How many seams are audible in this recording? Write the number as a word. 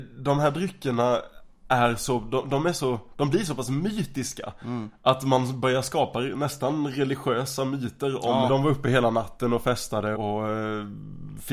two